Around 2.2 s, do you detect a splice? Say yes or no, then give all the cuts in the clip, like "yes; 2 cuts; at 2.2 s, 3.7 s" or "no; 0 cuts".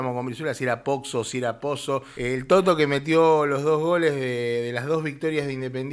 yes; 1 cut; at 2.2 s